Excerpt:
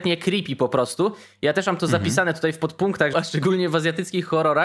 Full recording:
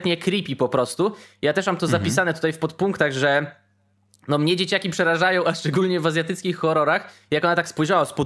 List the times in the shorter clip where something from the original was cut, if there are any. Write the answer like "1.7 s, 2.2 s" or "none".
3.1 s